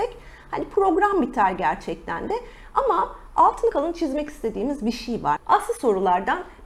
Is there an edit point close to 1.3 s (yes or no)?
no